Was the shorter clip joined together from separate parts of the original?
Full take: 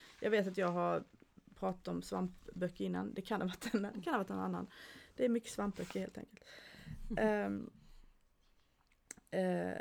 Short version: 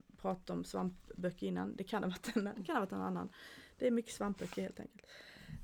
no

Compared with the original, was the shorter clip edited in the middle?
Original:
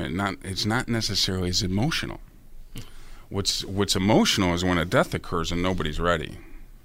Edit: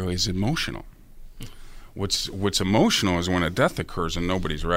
no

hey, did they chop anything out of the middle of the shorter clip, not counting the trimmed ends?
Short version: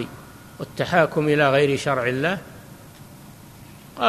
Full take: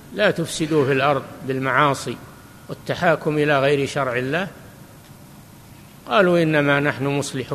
no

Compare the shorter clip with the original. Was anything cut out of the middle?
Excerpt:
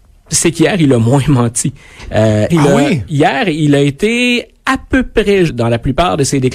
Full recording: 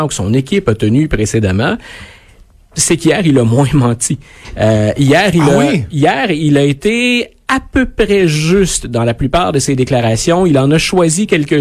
yes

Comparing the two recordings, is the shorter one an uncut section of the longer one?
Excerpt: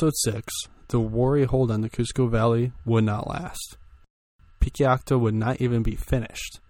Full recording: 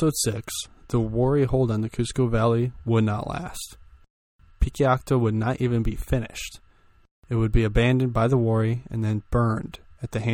yes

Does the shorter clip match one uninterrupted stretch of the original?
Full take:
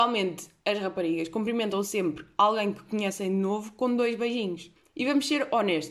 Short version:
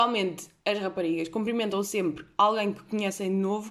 yes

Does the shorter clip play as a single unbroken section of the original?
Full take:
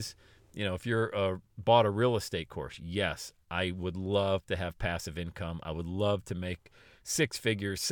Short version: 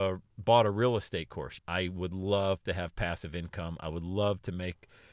no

